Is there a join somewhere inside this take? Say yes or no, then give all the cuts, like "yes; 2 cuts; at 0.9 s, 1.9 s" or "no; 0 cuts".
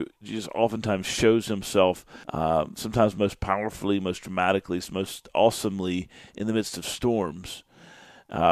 yes; 1 cut; at 2.2 s